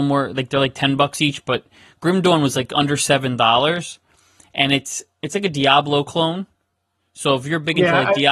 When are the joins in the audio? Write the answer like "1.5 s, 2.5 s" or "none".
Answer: none